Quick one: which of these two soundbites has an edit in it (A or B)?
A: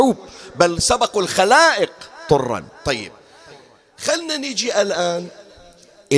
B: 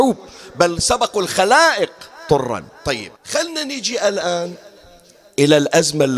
B